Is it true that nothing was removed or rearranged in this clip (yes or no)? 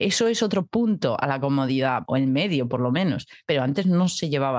no